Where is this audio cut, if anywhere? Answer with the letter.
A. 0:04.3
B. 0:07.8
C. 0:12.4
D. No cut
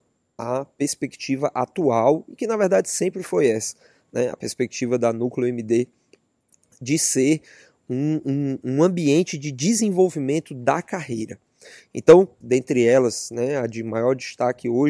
C